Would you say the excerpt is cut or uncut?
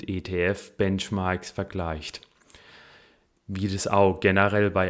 uncut